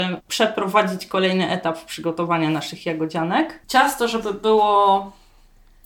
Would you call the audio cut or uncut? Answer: cut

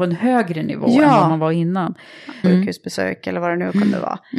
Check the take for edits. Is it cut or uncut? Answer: cut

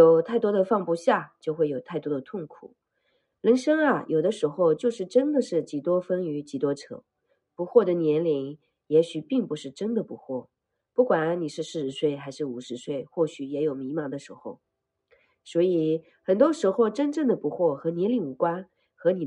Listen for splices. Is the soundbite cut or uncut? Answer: uncut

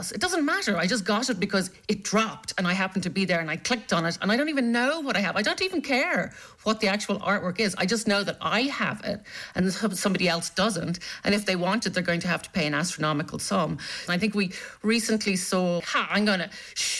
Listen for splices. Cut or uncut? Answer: cut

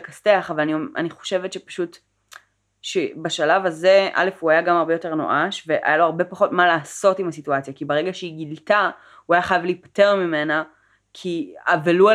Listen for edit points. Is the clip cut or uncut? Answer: uncut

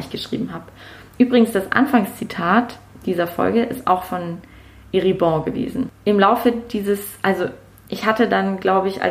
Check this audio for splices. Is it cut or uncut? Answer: uncut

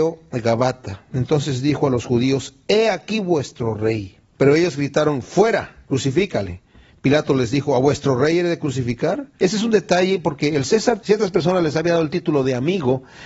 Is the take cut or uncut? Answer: cut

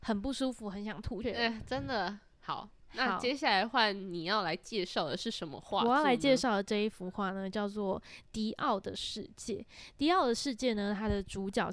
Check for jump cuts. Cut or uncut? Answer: cut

